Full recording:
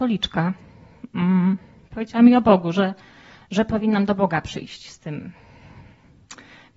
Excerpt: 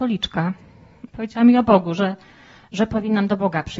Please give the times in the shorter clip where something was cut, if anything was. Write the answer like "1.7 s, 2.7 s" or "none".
1.1 s